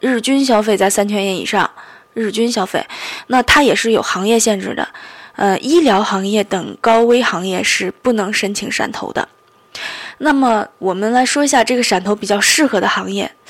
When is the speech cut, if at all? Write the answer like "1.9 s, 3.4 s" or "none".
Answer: none